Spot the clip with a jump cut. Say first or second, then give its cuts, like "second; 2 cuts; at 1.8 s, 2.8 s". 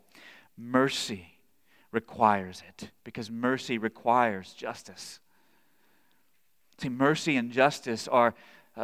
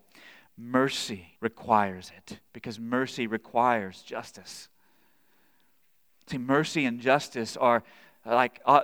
second; 1 cut; at 1.4 s